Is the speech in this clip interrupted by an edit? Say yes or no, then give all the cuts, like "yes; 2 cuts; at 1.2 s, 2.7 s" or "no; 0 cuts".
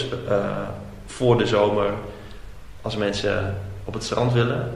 no; 0 cuts